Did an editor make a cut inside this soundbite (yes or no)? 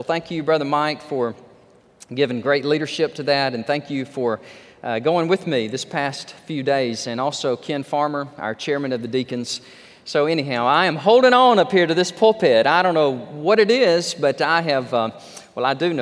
no